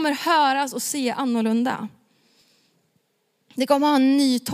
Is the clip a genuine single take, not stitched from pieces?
yes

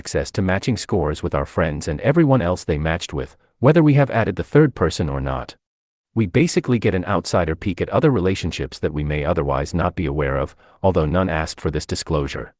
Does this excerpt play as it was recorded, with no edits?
no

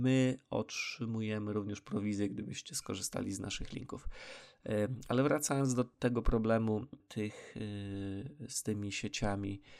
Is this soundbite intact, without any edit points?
yes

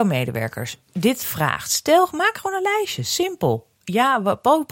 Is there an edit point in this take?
no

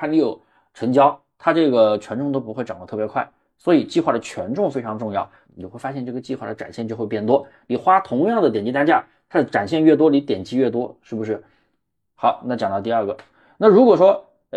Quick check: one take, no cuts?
no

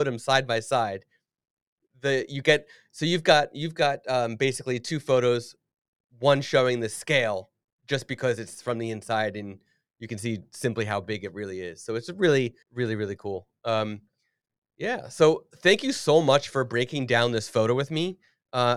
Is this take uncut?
no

